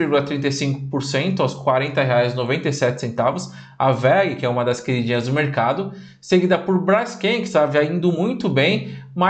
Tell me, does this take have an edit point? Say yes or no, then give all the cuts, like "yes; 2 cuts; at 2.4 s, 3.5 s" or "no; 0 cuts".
no; 0 cuts